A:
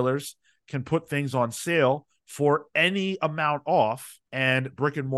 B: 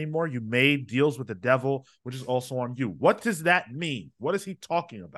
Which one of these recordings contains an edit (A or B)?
A